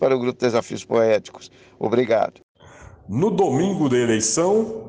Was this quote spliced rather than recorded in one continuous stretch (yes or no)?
no